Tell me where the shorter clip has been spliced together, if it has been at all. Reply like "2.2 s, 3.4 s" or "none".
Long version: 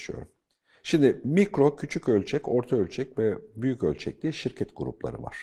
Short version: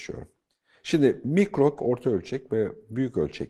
1.8 s